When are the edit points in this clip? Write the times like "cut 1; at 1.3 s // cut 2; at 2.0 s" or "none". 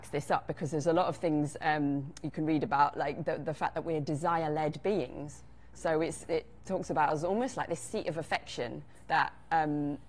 none